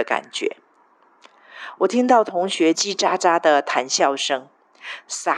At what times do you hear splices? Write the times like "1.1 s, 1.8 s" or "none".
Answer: 2.7 s